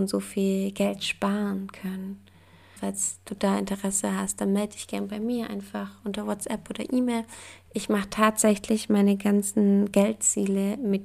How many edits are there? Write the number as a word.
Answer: two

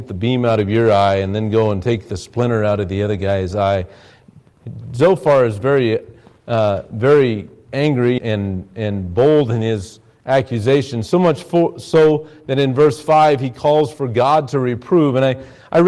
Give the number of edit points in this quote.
one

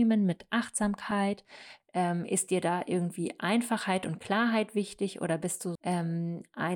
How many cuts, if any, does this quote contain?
two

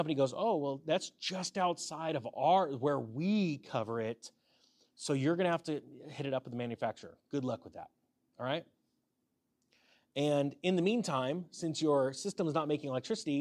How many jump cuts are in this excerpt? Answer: zero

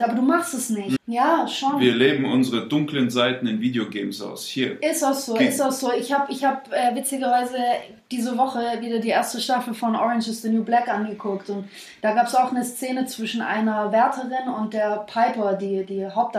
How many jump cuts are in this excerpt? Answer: one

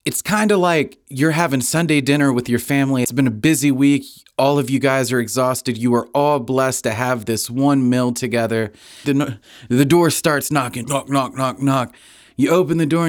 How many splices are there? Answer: two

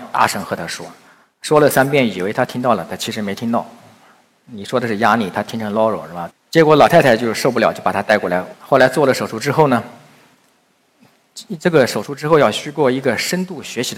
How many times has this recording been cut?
two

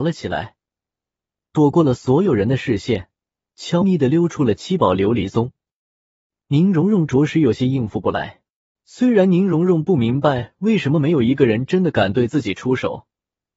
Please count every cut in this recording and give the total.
three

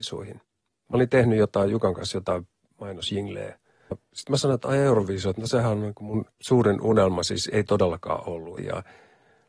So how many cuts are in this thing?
three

